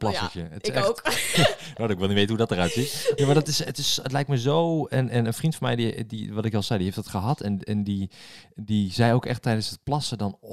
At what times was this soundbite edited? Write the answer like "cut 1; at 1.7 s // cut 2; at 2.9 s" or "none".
cut 1; at 1.3 s // cut 2; at 3.2 s

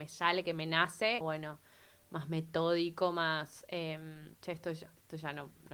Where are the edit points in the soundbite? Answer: cut 1; at 1.2 s // cut 2; at 4.3 s

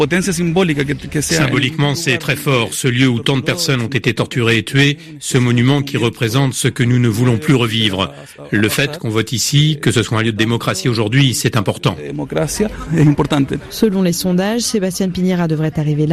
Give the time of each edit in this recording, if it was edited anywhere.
none

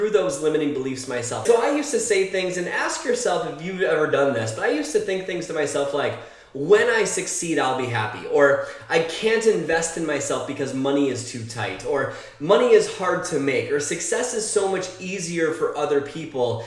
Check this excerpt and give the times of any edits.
cut 1; at 1.5 s

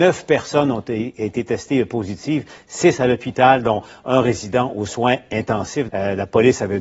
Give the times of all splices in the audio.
cut 1; at 5.9 s

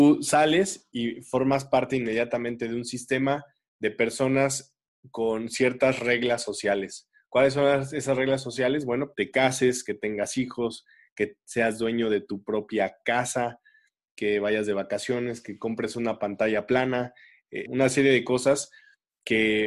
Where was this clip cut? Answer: cut 1; at 9.1 s // cut 2; at 14.1 s // cut 3; at 17.7 s

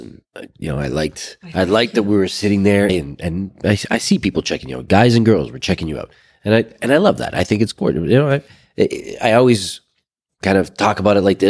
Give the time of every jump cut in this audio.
cut 1; at 2.9 s

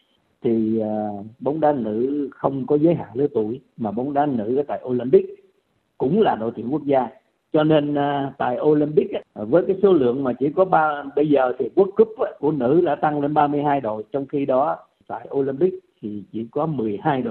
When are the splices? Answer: cut 1; at 12.4 s

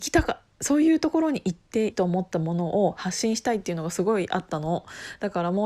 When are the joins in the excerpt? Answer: cut 1; at 1.9 s

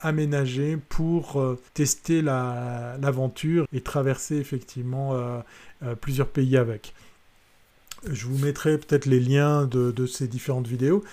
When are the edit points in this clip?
cut 1; at 1.7 s // cut 2; at 3.7 s

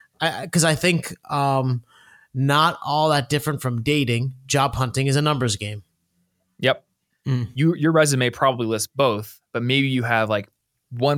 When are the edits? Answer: cut 1; at 7.1 s

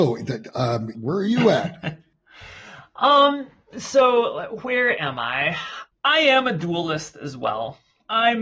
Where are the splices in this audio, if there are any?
cut 1; at 0.9 s

